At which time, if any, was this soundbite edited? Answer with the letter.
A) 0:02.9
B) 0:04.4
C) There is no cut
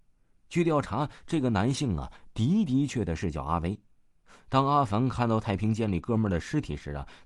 A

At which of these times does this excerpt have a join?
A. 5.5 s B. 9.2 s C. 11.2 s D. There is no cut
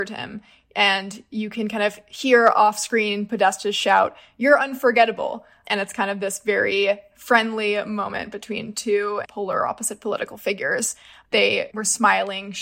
B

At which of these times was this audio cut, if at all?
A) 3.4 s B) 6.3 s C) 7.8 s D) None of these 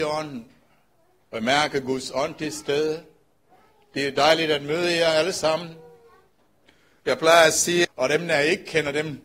C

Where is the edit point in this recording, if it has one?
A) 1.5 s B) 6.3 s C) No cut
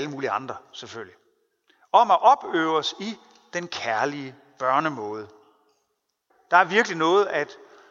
B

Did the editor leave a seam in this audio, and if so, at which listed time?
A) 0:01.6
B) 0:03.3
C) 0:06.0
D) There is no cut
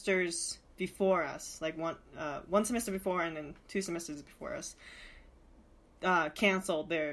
D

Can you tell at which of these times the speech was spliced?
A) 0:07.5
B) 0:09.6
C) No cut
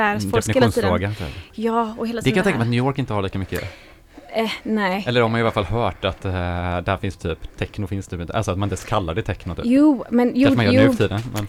A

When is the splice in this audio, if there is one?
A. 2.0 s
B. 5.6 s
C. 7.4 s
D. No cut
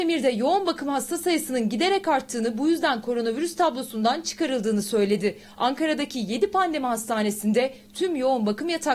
D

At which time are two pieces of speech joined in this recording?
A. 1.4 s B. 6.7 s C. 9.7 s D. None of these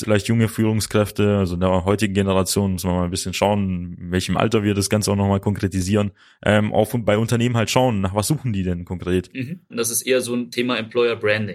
C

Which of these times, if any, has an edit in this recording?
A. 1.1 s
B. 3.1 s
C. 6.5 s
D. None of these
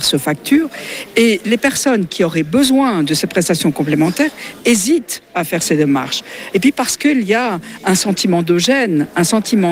C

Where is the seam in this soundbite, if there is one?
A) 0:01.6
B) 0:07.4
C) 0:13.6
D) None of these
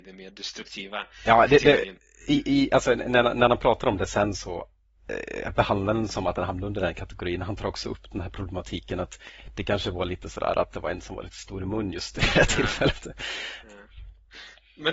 C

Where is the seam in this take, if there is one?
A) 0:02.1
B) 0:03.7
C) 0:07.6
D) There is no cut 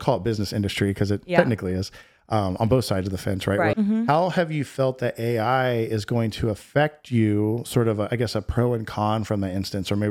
B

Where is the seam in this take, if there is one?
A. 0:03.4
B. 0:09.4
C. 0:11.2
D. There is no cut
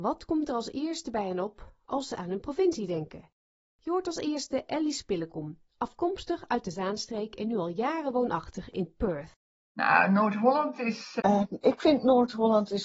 C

